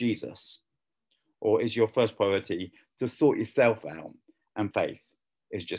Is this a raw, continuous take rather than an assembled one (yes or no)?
no